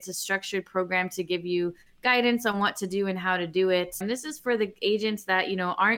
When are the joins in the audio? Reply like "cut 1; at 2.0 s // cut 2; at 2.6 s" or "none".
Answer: cut 1; at 4.0 s